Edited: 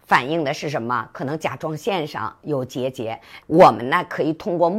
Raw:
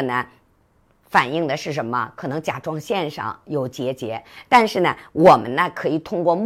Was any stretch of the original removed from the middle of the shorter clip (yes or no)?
yes